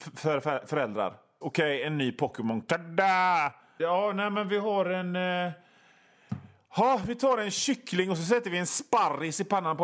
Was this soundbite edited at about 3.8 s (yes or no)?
yes